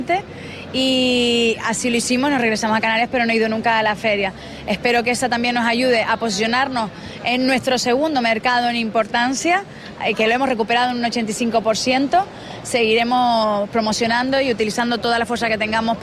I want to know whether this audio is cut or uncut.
cut